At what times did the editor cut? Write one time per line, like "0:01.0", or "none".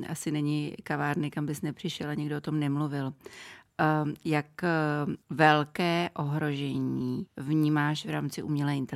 0:05.2
0:07.3